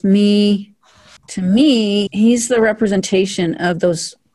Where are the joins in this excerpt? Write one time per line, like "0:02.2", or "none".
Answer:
0:01.2